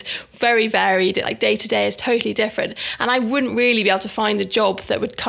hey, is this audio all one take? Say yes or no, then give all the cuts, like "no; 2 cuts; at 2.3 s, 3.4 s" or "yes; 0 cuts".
yes; 0 cuts